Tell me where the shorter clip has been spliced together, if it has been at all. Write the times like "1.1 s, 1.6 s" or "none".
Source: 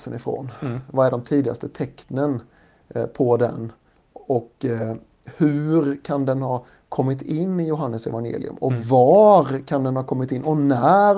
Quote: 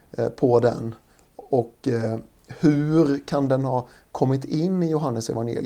none